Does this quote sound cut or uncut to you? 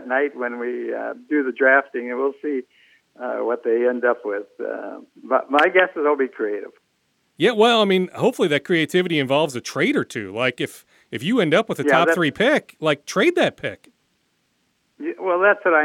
uncut